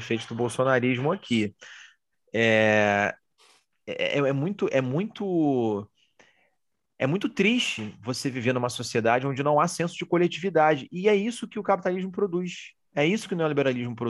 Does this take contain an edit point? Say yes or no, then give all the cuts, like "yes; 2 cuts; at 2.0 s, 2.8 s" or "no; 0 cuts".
no; 0 cuts